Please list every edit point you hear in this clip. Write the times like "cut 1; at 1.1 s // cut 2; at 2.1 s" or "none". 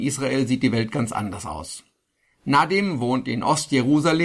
none